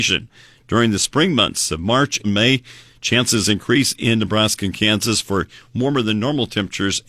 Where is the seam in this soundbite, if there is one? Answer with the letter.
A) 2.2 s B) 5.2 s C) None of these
A